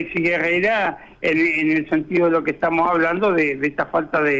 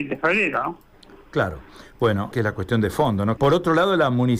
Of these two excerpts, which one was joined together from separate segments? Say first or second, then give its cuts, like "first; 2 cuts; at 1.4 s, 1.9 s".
second; 2 cuts; at 2.3 s, 3.4 s